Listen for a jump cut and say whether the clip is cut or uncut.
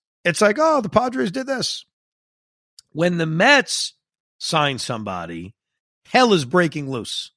uncut